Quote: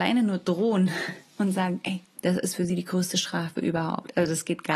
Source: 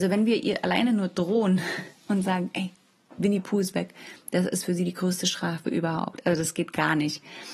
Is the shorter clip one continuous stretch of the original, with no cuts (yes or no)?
no